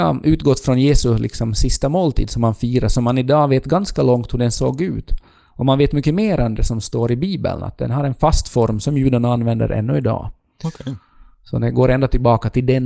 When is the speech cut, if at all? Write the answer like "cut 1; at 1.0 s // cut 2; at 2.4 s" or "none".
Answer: none